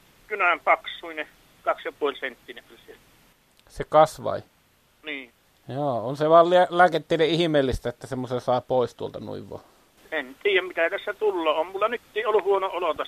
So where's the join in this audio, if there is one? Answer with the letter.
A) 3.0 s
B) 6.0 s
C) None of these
C